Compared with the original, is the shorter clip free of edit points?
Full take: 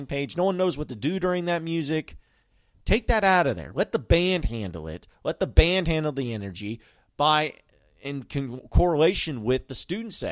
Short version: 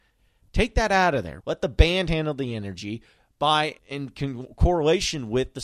no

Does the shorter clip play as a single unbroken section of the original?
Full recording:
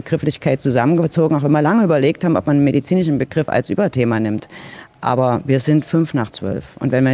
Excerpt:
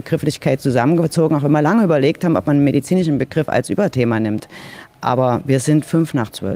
yes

